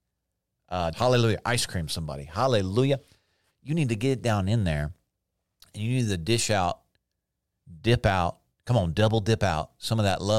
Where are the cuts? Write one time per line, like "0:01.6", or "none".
0:00.9